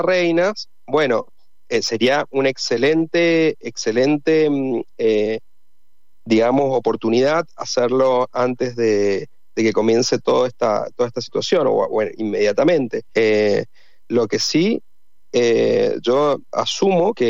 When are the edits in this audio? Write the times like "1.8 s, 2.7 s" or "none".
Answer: 13.1 s

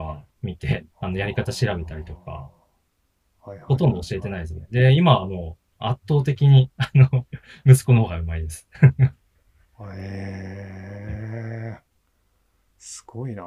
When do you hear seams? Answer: 0.9 s

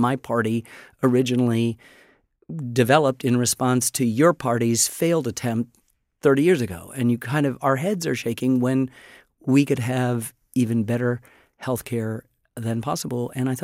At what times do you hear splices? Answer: none

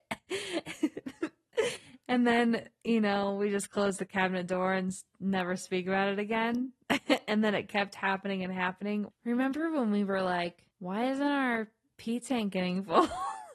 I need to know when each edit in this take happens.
9.1 s, 10.7 s

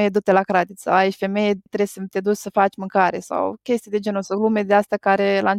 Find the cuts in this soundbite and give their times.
1.7 s

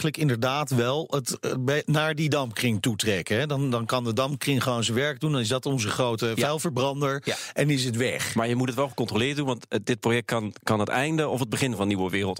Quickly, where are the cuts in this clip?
10.6 s

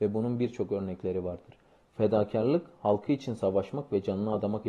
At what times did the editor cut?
1.9 s

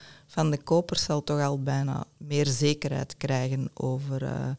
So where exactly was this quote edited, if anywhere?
none

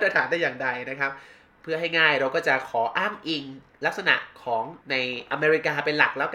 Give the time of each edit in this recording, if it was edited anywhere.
4.8 s

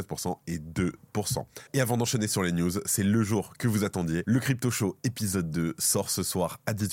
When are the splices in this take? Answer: 1.7 s

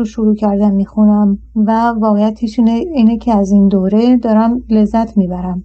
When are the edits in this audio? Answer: 1.5 s

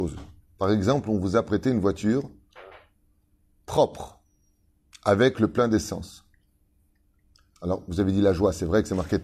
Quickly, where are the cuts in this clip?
7.6 s

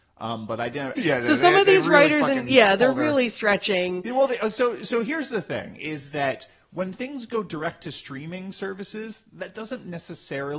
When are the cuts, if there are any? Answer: 0.9 s

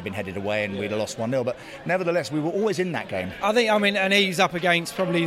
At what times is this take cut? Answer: 3.4 s

